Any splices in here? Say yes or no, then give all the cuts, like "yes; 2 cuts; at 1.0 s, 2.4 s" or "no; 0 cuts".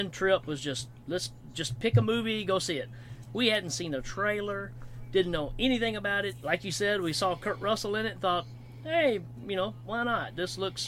no; 0 cuts